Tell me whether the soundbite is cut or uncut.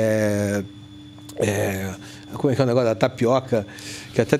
uncut